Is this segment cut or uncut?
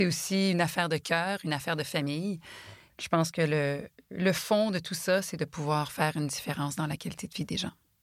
uncut